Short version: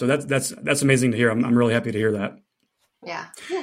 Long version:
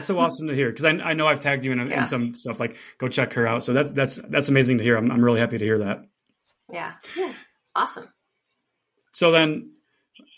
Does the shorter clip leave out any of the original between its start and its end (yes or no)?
no